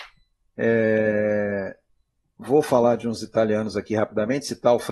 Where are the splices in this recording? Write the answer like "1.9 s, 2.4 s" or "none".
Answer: none

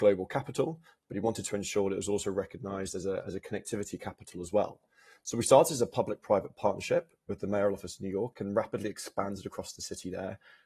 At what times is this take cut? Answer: none

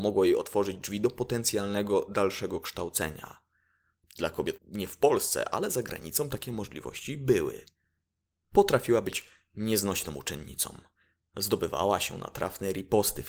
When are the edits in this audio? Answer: 4.6 s

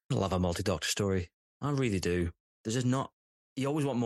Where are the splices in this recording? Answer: 2.5 s

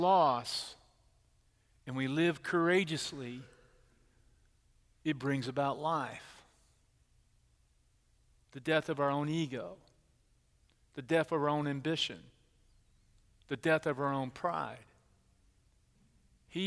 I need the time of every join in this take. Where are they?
none

